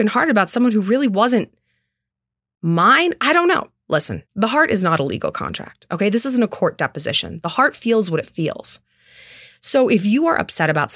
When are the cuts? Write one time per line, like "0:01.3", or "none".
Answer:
0:04.3